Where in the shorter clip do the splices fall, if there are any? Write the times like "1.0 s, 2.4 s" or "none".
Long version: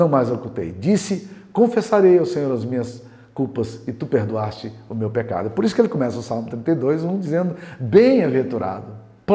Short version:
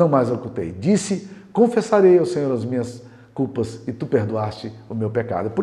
none